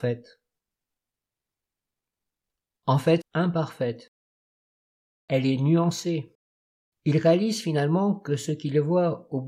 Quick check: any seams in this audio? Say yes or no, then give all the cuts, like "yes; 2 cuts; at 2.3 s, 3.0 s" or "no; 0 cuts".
yes; 2 cuts; at 3.2 s, 6.9 s